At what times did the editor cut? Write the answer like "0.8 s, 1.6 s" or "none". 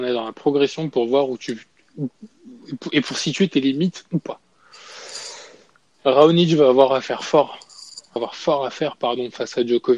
8.2 s